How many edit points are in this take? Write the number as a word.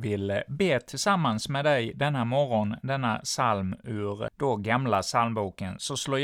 one